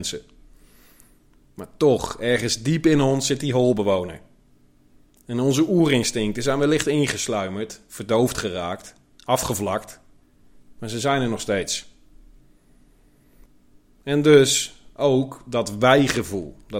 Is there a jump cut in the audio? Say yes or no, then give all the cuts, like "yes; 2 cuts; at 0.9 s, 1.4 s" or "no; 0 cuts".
no; 0 cuts